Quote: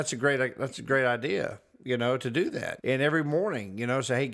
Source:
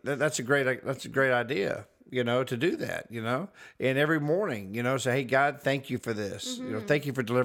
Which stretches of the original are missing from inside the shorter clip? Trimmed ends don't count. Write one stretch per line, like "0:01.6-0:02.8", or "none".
0:03.1-0:03.8